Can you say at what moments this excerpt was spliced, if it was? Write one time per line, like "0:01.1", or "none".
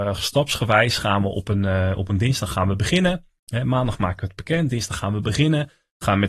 none